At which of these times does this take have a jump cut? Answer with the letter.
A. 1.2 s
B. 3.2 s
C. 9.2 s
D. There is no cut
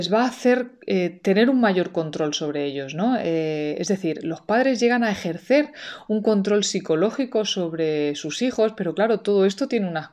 D